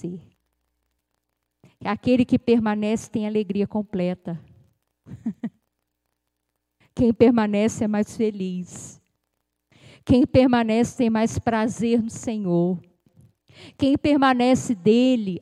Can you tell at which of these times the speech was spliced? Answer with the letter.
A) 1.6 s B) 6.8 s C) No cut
C